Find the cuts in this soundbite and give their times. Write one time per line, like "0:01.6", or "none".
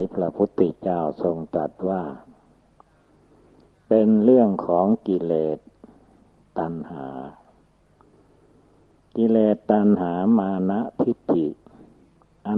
none